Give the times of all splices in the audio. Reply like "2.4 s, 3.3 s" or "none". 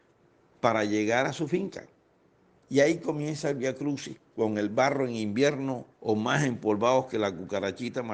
2.6 s, 5.9 s